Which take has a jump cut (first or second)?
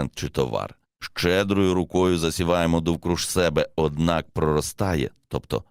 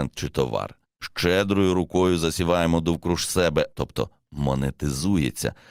second